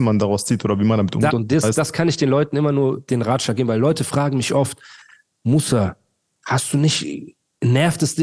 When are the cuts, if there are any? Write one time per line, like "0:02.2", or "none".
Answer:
0:01.3
0:06.2